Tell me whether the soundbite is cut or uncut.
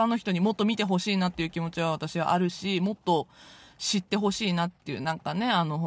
uncut